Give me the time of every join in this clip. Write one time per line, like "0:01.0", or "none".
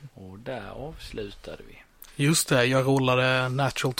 none